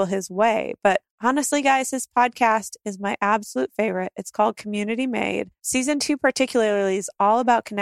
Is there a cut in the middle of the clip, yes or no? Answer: no